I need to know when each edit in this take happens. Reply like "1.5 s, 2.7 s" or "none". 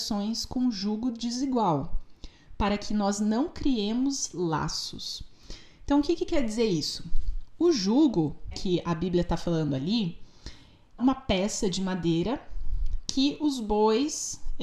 8.5 s, 11.0 s